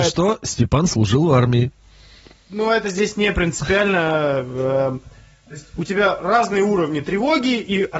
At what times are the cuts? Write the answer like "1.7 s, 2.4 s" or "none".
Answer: none